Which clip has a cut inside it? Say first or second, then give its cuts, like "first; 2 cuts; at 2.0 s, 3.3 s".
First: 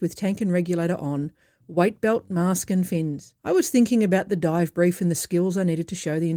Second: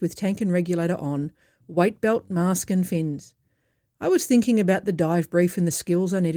first; 1 cut; at 3.4 s